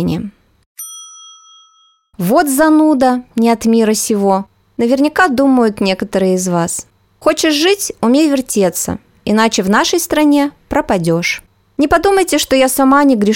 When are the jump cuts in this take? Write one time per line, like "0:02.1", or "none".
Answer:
none